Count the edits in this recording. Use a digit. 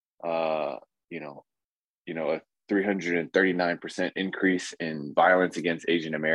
1